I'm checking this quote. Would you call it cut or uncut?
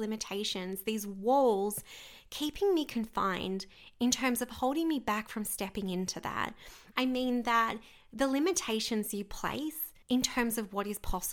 cut